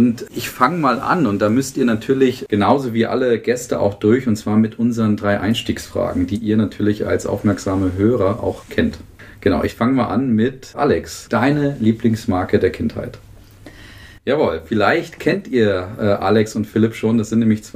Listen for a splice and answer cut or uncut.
cut